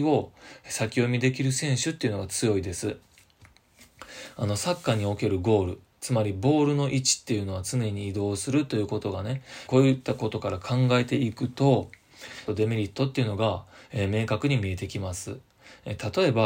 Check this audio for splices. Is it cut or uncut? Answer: cut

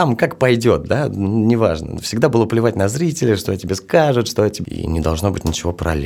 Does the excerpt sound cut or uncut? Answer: cut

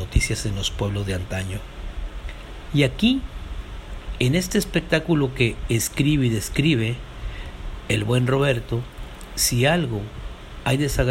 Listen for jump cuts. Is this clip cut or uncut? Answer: cut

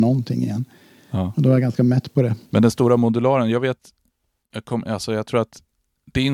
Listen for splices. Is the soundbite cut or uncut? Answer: cut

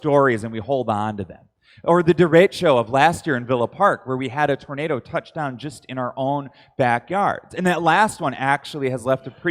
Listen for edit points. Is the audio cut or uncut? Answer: uncut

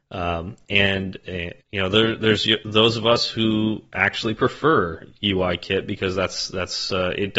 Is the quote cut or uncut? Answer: cut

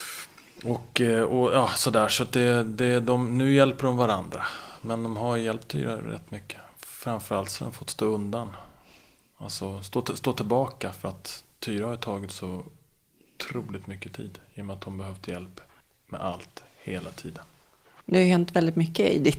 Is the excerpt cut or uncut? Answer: uncut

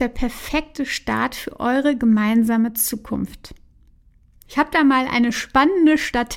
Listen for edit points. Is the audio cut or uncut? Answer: cut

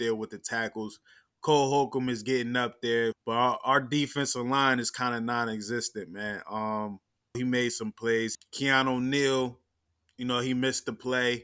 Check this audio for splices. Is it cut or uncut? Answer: cut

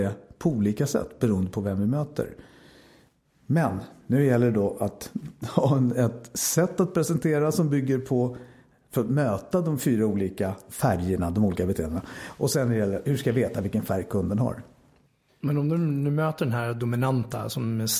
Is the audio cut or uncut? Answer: cut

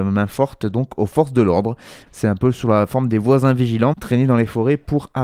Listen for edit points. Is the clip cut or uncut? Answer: cut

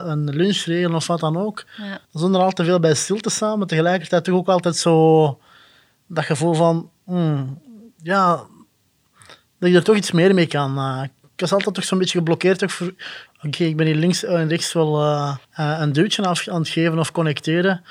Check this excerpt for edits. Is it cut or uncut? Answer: cut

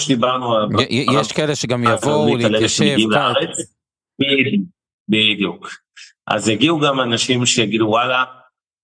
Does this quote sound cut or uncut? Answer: uncut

